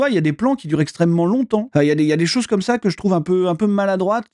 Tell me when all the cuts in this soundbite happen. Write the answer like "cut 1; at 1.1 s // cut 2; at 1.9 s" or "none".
cut 1; at 1.7 s